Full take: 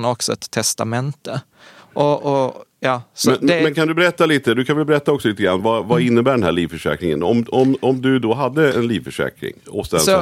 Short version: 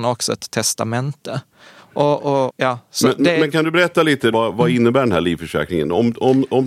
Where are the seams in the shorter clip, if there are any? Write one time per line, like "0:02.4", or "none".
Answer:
0:02.5
0:04.3